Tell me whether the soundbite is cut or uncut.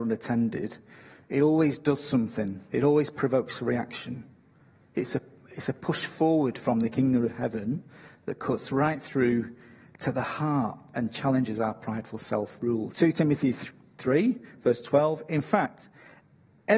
cut